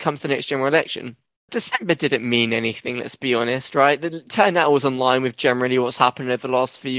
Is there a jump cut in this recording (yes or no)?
yes